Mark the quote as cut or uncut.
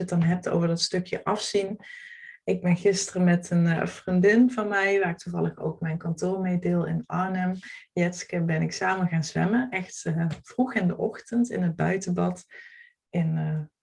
uncut